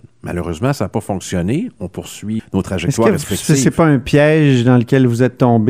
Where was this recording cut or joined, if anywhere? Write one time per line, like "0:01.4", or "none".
0:02.4